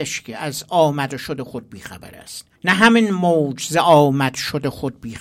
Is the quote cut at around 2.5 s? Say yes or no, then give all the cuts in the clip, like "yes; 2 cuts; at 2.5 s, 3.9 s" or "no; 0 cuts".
yes; 1 cut; at 2.5 s